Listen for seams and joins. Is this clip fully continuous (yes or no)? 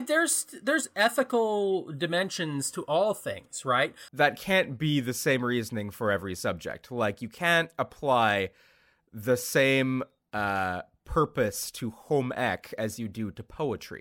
no